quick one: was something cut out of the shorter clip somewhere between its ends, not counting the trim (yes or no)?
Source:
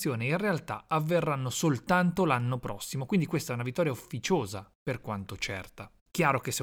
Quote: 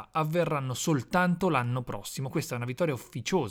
yes